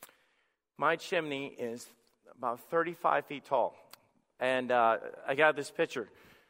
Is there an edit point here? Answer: no; 0 cuts

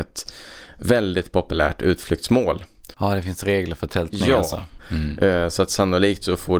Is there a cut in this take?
yes; 2 cuts; at 2.9 s, 4.8 s

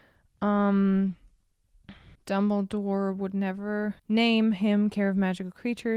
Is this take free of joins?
no; 2 cuts; at 2.1 s, 4.0 s

